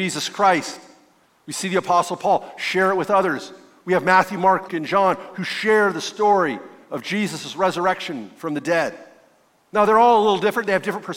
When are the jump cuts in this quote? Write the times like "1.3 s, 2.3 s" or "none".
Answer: 4.7 s